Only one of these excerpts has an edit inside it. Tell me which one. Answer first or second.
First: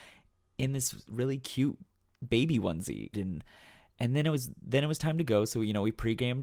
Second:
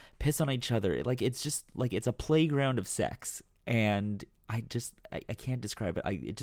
first